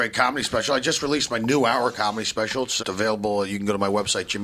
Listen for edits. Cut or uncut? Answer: cut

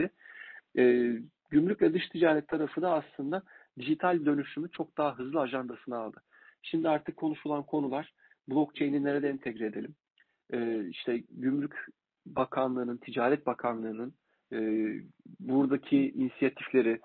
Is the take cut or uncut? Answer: uncut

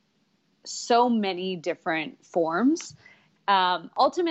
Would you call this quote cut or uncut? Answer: cut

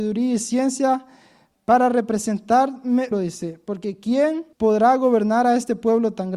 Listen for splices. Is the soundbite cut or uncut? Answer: cut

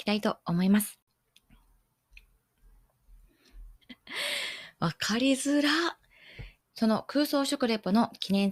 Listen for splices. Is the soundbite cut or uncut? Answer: cut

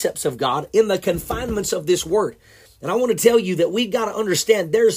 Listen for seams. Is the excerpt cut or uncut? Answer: cut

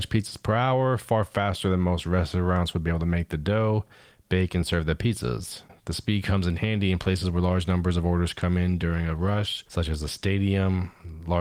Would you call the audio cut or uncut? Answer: uncut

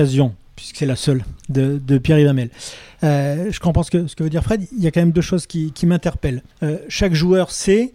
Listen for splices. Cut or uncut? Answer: cut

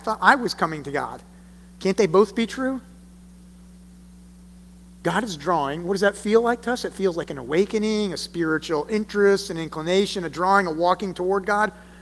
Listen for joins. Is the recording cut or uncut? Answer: uncut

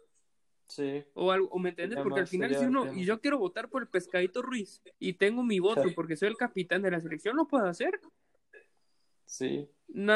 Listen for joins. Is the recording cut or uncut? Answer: cut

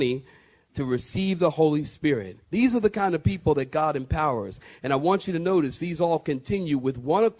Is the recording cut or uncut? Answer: cut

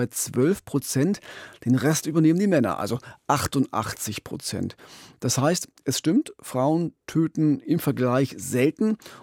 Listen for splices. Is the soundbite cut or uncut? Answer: uncut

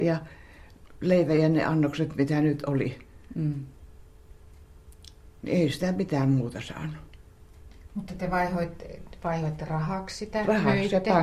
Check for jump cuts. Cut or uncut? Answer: uncut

